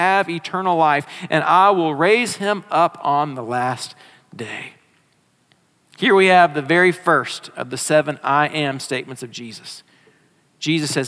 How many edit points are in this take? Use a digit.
0